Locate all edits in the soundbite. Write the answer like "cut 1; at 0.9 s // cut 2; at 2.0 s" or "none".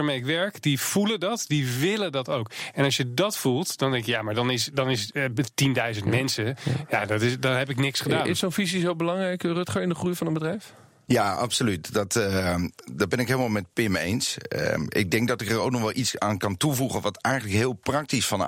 none